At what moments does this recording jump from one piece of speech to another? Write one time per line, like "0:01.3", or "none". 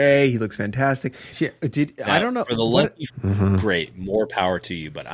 0:01.3
0:03.1